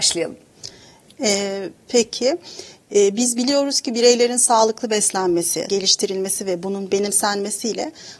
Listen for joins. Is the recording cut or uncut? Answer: cut